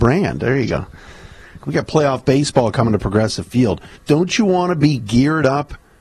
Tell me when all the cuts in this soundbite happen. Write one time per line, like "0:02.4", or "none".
0:01.6
0:04.0